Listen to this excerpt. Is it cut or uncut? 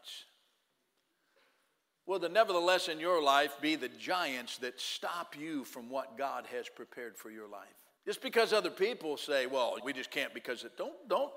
cut